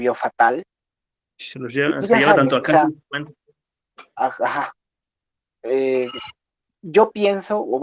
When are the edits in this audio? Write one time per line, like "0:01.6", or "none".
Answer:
none

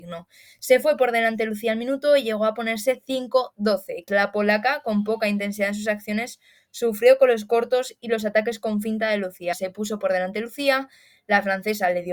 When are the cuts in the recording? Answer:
0:04.1
0:09.5

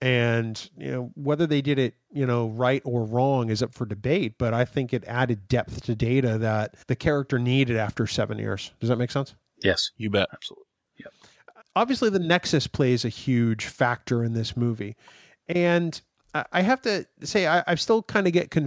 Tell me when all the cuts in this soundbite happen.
0:06.8
0:11.6

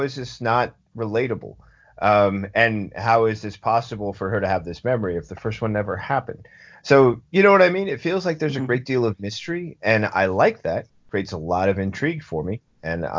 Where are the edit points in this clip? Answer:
none

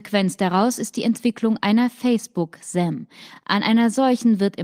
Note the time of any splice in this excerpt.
none

